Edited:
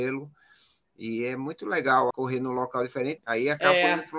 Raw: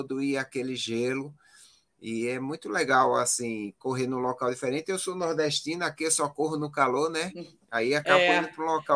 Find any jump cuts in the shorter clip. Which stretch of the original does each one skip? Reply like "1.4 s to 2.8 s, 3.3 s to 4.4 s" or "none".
3.1 s to 3.8 s, 4.8 s to 7.6 s